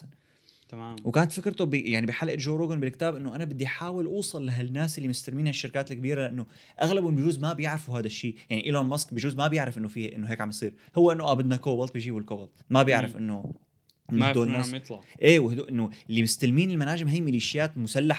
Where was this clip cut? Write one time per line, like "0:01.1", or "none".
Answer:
0:12.6